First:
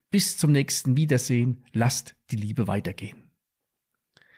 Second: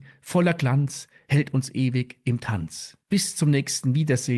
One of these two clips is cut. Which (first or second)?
second